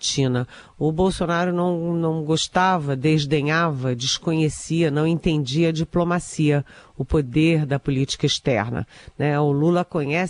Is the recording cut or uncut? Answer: uncut